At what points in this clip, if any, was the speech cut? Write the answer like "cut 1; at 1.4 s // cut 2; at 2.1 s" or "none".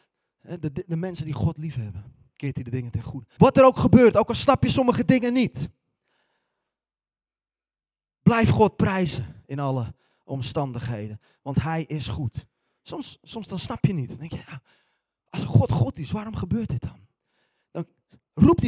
cut 1; at 3.4 s

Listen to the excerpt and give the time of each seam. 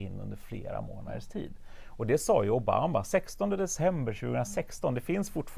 none

